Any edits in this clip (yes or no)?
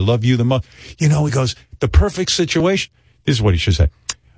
no